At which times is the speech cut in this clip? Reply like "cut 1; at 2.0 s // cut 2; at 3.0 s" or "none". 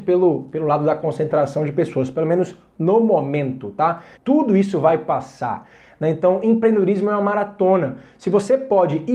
cut 1; at 4.2 s

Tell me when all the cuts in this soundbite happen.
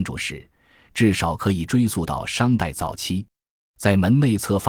cut 1; at 3.7 s

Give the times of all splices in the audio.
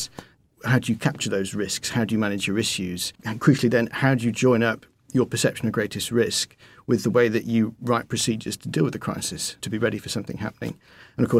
cut 1; at 3.2 s // cut 2; at 9.6 s

